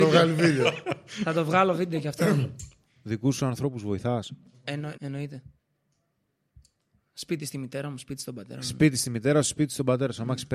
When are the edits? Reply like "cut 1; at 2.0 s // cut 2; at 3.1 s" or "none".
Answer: cut 1; at 5.0 s